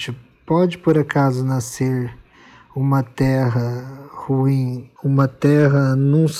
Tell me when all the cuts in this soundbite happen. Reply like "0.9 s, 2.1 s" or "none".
5.0 s